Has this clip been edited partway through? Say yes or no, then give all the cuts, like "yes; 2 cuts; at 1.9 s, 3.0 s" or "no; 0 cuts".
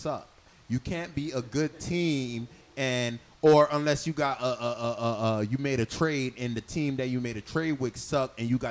no; 0 cuts